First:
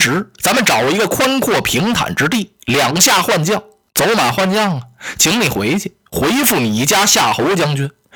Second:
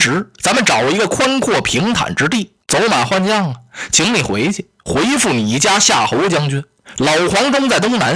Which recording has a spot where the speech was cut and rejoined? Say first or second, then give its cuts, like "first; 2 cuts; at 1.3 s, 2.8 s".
second; 2 cuts; at 2.6 s, 7.0 s